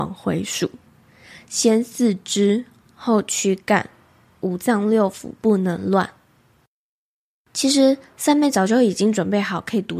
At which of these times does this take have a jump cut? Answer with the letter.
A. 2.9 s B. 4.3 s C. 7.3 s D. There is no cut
D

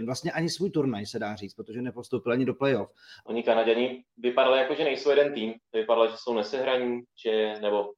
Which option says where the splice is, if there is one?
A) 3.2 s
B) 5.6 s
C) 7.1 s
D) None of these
A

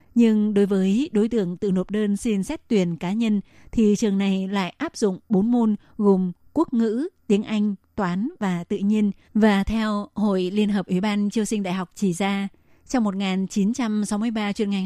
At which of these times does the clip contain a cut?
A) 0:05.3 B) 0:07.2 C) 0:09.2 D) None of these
C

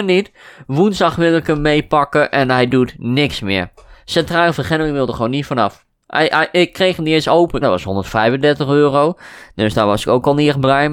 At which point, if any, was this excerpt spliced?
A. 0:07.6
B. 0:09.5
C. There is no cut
A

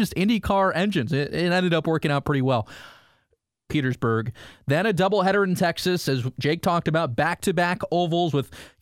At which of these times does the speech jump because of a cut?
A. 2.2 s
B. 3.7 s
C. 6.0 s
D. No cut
B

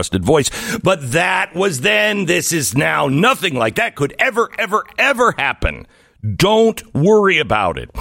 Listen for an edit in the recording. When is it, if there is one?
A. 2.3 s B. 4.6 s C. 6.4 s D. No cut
D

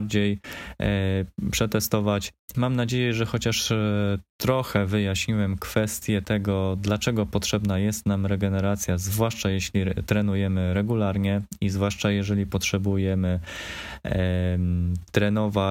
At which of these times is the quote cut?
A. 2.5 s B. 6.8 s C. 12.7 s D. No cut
A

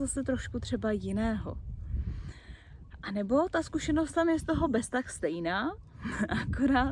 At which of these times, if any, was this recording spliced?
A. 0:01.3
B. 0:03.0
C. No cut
C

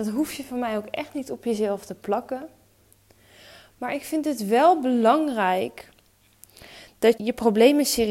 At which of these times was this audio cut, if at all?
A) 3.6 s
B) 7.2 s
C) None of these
B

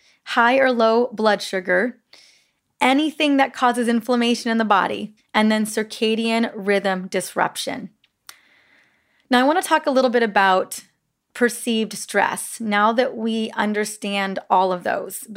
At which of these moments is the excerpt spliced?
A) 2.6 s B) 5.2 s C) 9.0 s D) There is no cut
B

